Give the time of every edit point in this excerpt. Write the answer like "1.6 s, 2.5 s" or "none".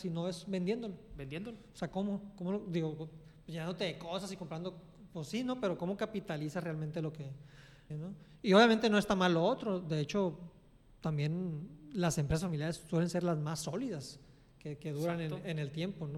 7.9 s

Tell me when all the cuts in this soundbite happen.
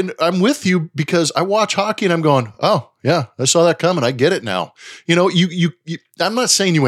none

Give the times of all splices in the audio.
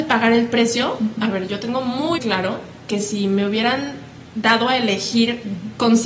2.2 s

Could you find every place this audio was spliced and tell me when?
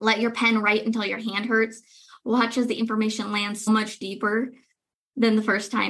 3.7 s

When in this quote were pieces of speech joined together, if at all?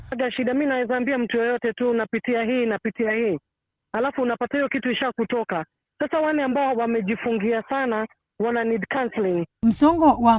none

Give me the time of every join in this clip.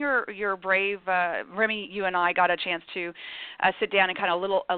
none

